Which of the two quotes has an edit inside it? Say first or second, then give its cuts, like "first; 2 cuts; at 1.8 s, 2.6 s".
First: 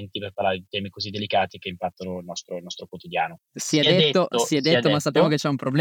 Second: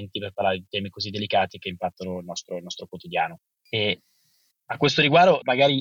first; 1 cut; at 3.5 s